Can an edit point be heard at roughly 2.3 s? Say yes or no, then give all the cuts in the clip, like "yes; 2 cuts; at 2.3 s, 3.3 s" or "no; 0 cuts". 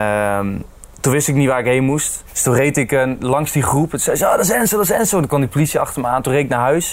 yes; 1 cut; at 2.3 s